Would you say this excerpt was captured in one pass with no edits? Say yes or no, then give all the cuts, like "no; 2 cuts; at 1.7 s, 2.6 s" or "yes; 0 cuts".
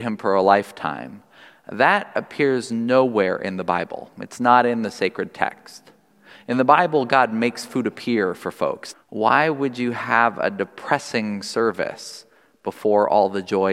no; 1 cut; at 8.9 s